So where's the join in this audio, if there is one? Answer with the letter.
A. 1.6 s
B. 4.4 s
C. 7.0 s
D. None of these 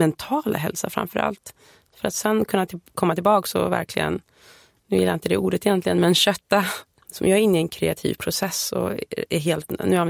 C